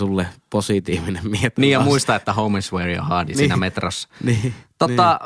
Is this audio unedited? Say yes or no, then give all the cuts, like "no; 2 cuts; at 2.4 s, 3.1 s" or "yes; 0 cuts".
no; 1 cut; at 3.3 s